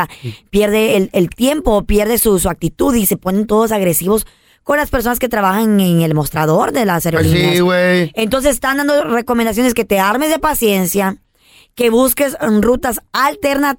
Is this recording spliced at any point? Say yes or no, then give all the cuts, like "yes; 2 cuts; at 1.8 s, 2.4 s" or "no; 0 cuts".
no; 0 cuts